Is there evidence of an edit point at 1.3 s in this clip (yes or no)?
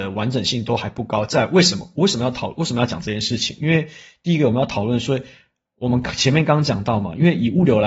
no